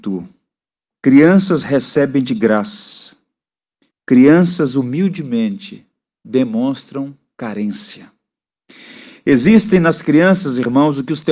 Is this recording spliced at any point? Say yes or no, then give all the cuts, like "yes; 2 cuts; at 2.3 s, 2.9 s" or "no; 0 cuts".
yes; 1 cut; at 3.9 s